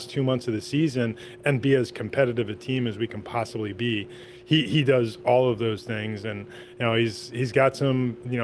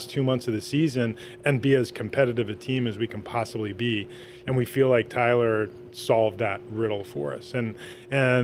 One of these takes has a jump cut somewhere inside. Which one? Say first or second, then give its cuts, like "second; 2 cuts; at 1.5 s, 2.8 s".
second; 1 cut; at 4.4 s